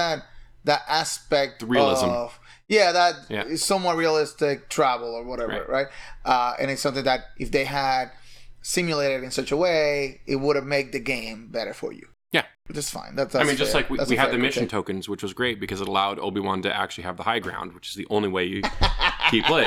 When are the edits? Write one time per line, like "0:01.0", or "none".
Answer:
none